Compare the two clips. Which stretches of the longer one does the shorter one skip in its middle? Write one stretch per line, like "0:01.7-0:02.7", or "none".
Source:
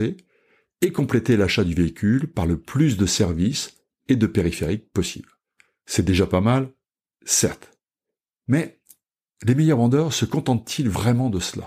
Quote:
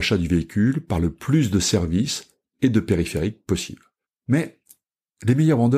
0:05.5-0:08.2

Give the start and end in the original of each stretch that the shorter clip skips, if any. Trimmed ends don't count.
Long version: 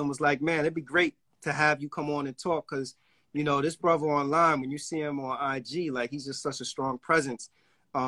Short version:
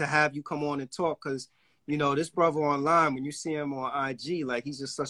none

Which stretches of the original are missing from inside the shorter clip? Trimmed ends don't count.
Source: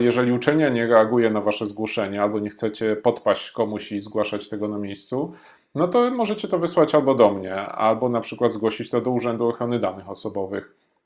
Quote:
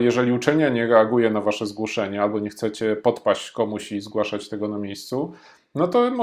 none

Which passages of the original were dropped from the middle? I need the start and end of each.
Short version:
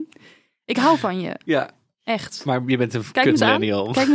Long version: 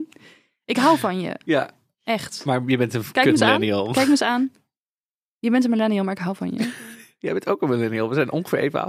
none

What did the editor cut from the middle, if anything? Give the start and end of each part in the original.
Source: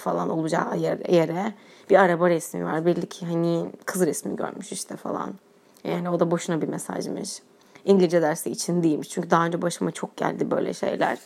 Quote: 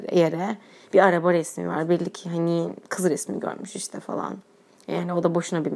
none

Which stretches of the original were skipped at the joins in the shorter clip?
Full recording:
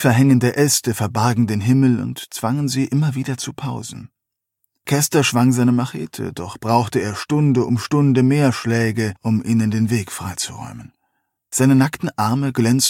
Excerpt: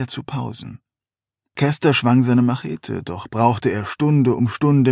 none

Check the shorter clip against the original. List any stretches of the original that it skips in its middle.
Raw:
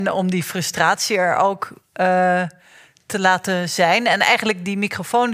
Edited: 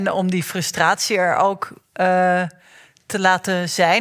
none

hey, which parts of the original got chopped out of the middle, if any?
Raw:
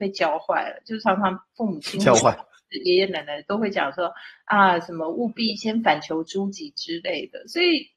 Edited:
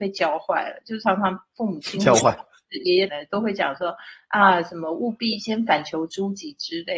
0:03.1-0:03.2

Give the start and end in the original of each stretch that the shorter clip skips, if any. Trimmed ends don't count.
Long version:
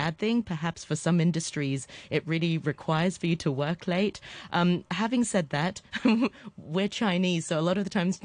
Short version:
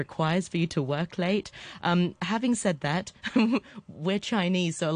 none

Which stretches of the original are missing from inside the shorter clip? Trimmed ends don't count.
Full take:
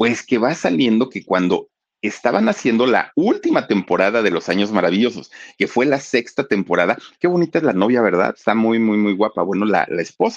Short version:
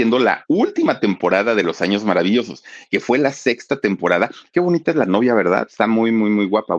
none

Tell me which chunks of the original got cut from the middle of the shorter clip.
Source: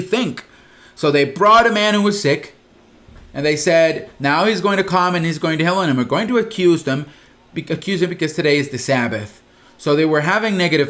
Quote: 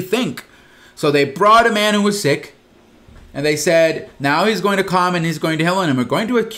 none

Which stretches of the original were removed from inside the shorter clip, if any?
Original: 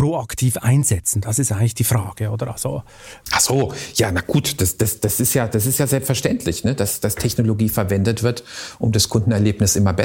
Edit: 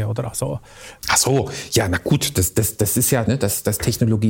0:05.5-0:06.6

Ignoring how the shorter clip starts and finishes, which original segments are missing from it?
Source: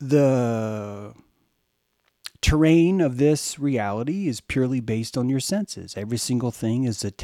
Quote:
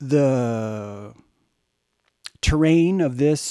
none

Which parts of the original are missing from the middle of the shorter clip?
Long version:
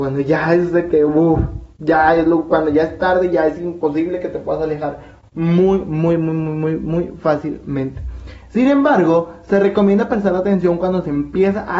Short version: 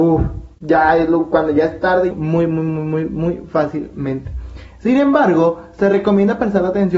0:03.3-0:05.8

